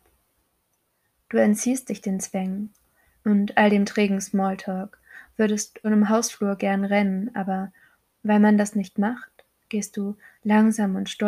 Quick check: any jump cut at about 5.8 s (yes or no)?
yes